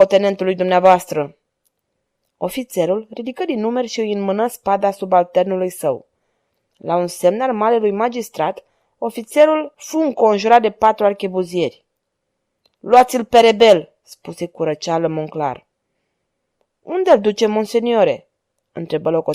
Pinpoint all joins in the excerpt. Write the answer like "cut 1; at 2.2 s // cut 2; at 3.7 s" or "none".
none